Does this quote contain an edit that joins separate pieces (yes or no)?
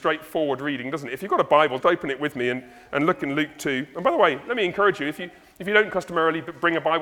yes